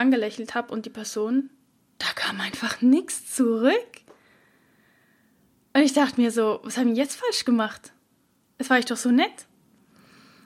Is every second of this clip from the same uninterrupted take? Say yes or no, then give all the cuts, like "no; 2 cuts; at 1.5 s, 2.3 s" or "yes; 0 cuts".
yes; 0 cuts